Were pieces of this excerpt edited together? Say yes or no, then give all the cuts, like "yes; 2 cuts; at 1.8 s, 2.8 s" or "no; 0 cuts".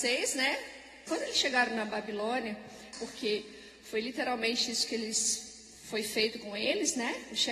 yes; 2 cuts; at 1.1 s, 2.9 s